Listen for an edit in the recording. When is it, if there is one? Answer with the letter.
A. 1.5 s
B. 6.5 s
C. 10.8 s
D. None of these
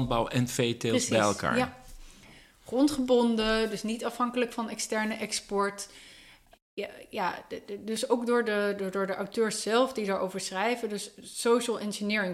B